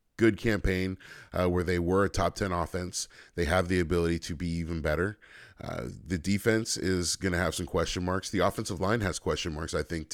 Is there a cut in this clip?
no; 0 cuts

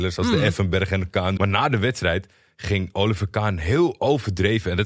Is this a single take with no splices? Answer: no; 1 cut; at 1.4 s

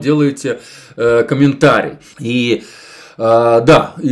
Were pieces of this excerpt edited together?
yes; 1 cut; at 2.1 s

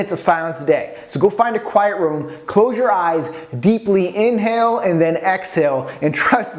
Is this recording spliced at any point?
no; 0 cuts

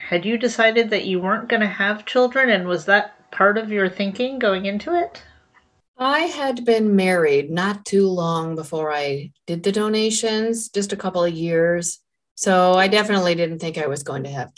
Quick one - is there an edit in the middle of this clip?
no; 0 cuts

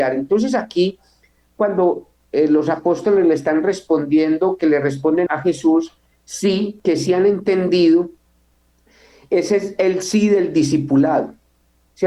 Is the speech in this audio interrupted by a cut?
yes; 1 cut; at 5.3 s

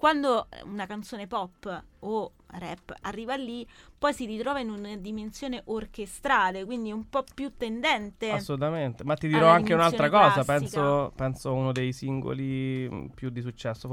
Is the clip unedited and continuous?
yes; 0 cuts

